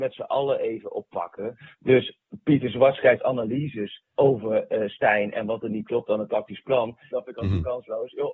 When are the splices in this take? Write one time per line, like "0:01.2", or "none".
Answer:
0:04.1
0:07.1